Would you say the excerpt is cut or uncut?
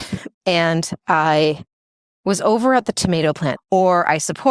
cut